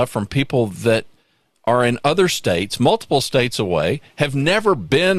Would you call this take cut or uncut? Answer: uncut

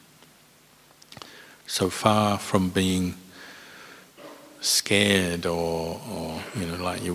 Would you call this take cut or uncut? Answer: uncut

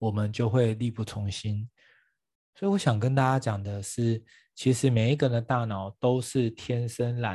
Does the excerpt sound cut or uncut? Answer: uncut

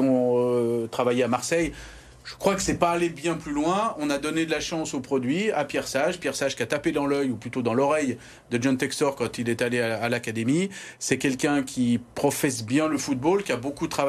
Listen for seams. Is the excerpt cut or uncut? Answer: uncut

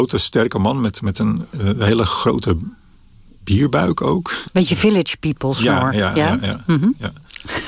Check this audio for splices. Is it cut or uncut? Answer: cut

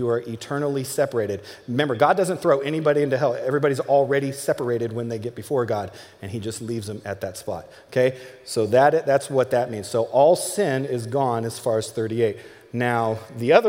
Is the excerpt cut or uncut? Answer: uncut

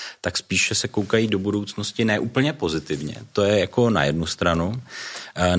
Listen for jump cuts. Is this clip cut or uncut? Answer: uncut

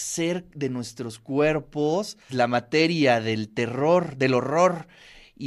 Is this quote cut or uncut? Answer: cut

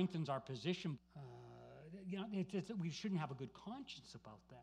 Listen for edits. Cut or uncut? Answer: cut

